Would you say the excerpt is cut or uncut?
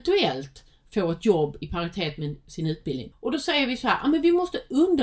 cut